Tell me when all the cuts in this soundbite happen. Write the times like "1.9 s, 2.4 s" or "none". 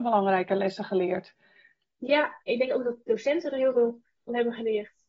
2.5 s